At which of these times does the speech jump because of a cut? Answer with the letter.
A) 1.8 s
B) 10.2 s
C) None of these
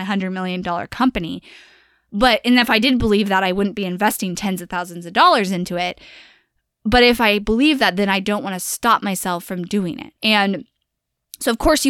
B